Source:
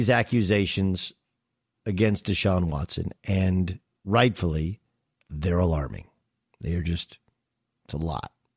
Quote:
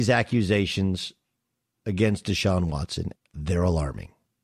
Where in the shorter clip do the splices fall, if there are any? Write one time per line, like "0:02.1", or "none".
0:03.2